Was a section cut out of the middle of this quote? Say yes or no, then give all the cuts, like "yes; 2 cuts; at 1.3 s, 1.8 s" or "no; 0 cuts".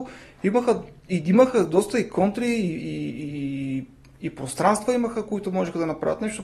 no; 0 cuts